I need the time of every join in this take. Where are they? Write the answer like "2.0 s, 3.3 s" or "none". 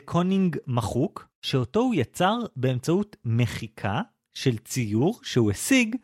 1.3 s